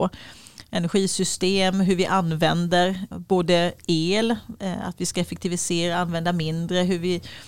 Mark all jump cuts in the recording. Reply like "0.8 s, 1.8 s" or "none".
3.1 s

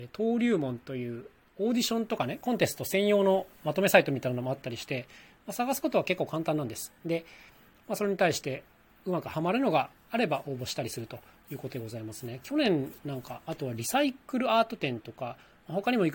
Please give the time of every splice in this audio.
none

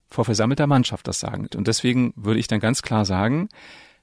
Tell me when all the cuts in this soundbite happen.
1.5 s

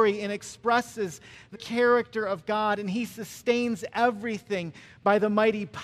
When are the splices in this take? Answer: 1.5 s

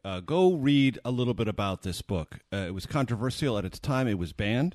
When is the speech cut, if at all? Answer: none

